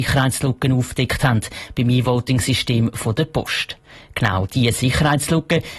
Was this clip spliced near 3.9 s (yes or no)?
no